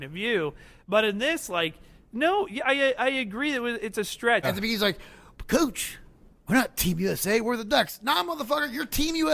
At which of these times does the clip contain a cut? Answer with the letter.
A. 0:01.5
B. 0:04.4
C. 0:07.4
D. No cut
B